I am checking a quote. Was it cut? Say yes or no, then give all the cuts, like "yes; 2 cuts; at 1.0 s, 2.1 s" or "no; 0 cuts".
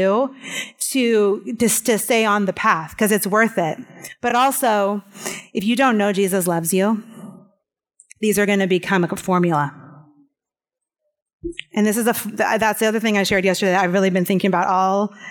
no; 0 cuts